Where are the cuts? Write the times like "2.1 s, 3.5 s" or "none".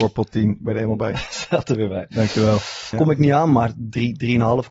2.9 s